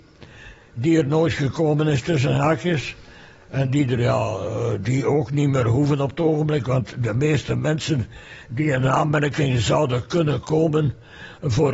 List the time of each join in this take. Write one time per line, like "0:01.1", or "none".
none